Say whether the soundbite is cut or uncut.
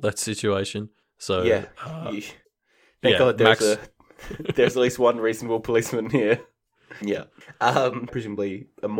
cut